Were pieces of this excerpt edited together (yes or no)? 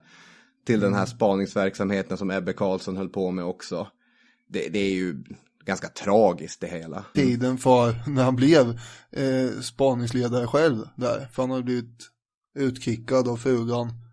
yes